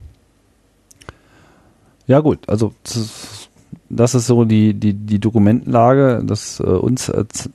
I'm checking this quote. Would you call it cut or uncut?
uncut